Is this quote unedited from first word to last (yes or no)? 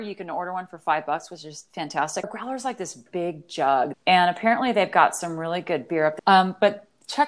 no